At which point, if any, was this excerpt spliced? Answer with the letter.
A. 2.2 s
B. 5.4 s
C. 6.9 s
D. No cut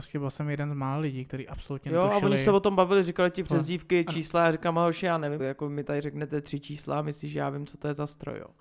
B